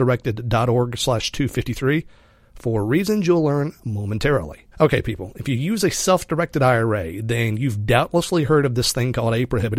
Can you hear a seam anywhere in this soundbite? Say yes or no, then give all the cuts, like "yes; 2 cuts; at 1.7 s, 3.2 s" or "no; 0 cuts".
yes; 1 cut; at 4.7 s